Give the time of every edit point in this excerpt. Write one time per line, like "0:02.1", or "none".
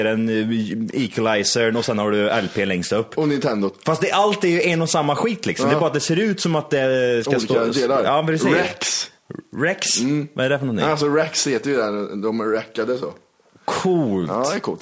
none